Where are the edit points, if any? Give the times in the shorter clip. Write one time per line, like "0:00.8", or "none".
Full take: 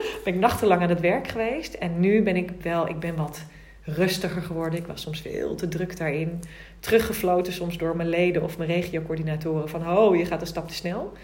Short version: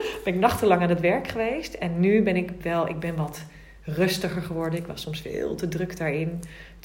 none